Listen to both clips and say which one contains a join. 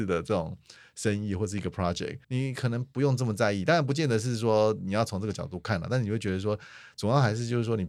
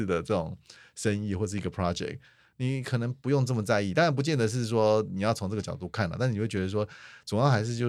first; 1 cut; at 2.2 s

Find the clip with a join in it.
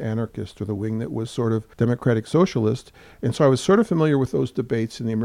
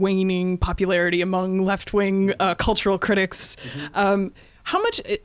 first; 1 cut; at 1.7 s

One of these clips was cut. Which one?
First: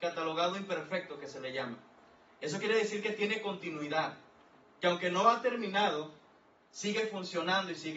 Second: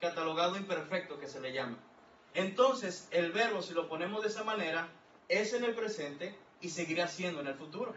second; 2 cuts; at 2.2 s, 5.2 s

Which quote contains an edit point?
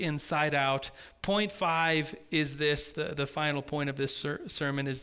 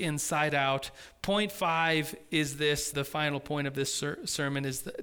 second; 1 cut; at 2.9 s

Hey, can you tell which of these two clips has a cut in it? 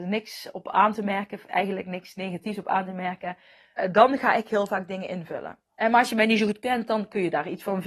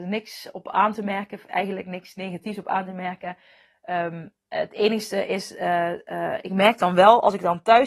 first; 2 cuts; at 3.8 s, 5.6 s

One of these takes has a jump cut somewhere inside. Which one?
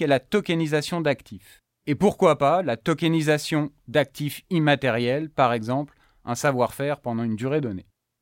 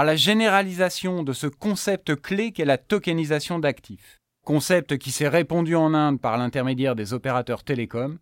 second; 1 cut; at 4.3 s

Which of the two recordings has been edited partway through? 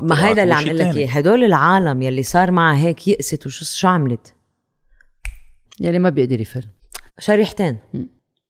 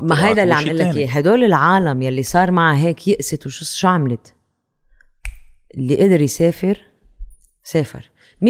first; 2 cuts; at 5.6 s, 7.1 s

